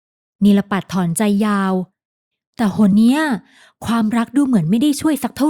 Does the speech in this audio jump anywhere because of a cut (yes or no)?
yes